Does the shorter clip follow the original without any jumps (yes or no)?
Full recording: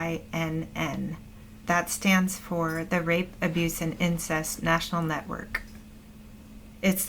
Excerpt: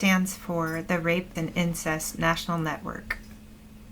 no